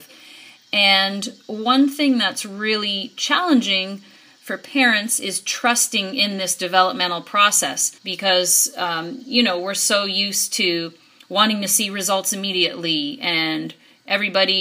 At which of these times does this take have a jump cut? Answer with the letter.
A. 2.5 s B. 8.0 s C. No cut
B